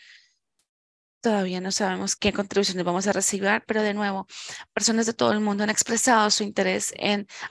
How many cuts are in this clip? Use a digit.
2